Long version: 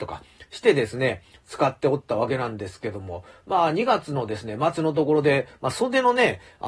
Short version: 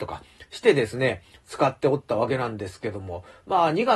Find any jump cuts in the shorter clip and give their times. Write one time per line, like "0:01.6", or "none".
none